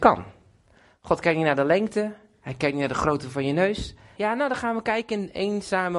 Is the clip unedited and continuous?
no; 1 cut; at 4.2 s

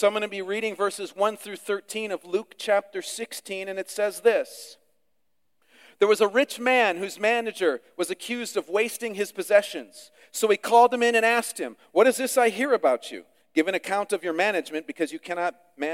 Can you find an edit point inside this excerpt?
no; 0 cuts

